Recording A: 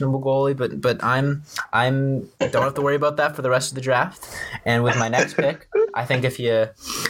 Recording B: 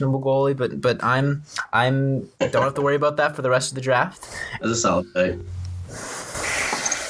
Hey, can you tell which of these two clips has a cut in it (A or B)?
B